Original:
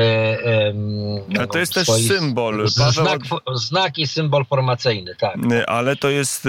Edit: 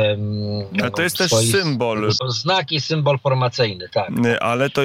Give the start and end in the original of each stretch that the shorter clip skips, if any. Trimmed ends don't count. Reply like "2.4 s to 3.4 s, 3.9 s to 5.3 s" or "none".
2.7 s to 3.5 s